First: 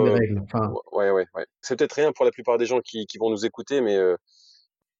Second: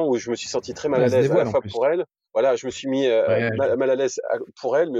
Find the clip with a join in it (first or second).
first